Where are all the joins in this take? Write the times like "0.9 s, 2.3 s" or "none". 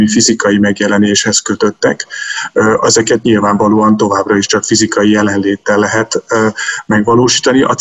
none